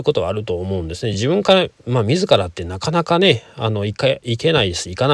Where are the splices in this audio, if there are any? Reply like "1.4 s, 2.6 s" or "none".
none